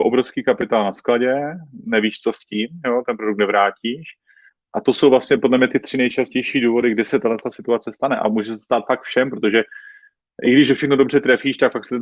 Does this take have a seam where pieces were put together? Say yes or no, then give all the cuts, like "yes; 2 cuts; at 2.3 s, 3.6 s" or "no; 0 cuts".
no; 0 cuts